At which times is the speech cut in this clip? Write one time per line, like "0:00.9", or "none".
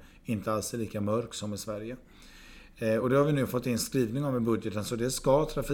none